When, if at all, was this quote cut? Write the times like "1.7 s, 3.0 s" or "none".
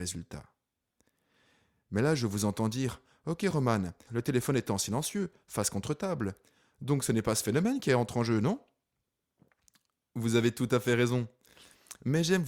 4.1 s